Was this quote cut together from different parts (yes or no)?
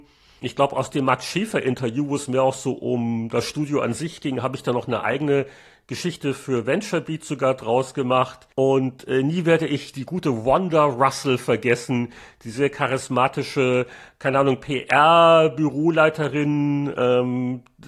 yes